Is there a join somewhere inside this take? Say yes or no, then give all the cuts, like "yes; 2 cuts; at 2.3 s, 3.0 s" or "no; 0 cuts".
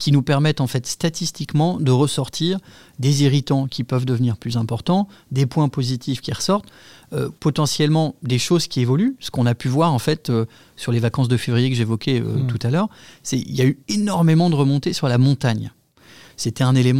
yes; 1 cut; at 7.4 s